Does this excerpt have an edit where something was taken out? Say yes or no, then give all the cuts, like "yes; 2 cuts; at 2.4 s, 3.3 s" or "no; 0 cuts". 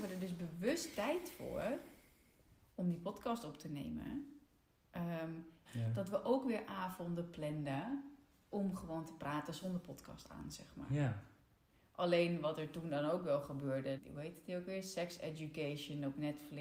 yes; 2 cuts; at 5.6 s, 14.0 s